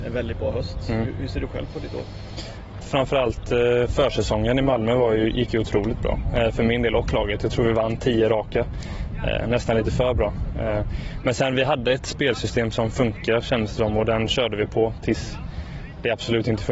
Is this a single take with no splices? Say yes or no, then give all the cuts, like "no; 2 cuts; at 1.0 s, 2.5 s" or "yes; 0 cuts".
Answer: no; 1 cut; at 2.8 s